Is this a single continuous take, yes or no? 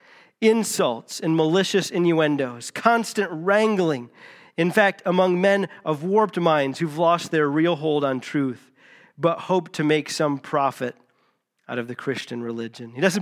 yes